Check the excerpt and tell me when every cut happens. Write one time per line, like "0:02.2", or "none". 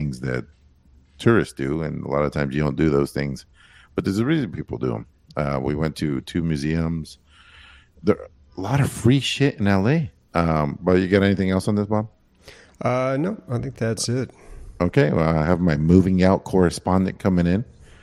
0:10.3